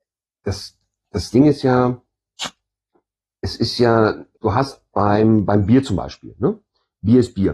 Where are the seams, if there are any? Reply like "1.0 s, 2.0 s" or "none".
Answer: 4.4 s